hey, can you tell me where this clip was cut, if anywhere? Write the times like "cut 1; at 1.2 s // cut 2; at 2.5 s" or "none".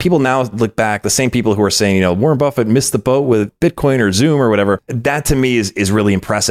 cut 1; at 4.9 s

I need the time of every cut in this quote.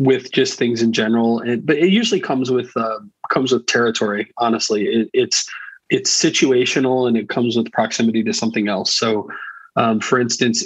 none

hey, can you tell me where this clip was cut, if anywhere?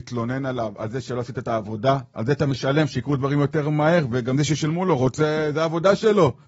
none

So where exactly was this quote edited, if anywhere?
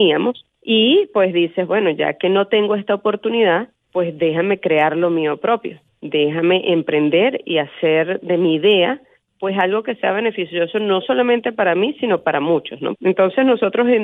cut 1; at 12.9 s

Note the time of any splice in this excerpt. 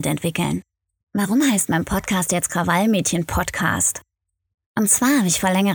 cut 1; at 1.0 s

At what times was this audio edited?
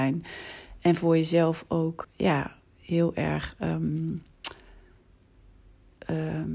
cut 1; at 2.0 s

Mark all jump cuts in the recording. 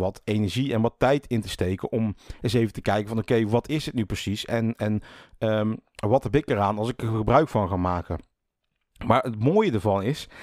none

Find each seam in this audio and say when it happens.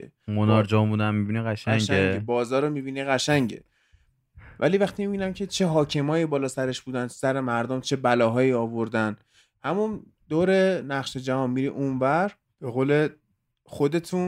none

